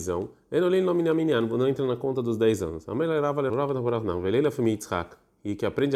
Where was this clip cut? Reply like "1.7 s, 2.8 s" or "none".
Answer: 3.5 s